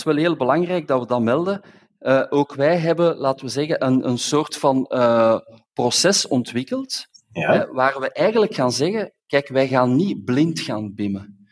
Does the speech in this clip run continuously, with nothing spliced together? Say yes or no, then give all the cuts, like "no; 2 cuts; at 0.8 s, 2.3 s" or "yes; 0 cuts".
yes; 0 cuts